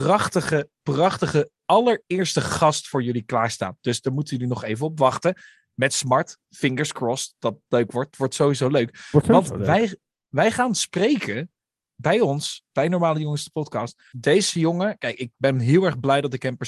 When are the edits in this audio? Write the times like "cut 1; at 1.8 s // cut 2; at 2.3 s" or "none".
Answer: cut 1; at 14.1 s